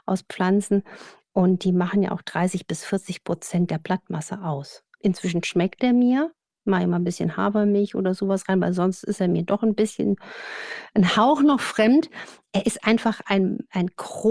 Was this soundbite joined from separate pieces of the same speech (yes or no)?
yes